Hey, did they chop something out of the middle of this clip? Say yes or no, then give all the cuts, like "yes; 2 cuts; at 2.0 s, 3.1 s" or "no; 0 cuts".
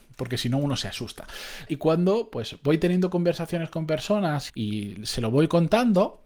yes; 2 cuts; at 1.7 s, 4.5 s